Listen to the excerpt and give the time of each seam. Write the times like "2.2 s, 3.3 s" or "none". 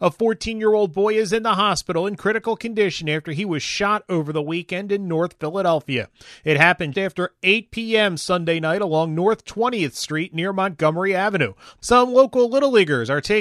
6.9 s, 11.8 s